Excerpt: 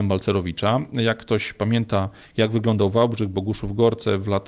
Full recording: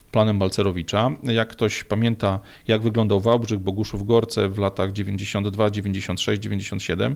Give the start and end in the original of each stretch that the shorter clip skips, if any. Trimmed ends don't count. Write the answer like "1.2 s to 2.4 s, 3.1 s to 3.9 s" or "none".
none